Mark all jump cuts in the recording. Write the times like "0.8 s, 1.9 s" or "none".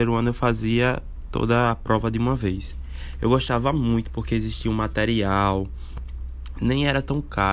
none